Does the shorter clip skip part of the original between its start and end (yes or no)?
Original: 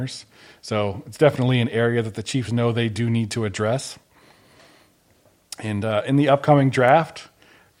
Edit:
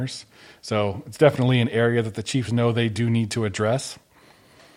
no